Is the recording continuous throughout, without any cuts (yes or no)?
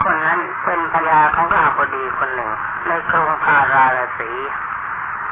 no